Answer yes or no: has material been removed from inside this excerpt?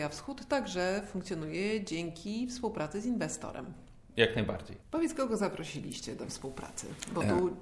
yes